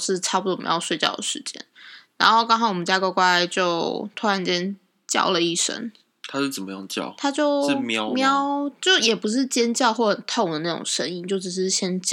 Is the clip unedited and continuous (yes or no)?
yes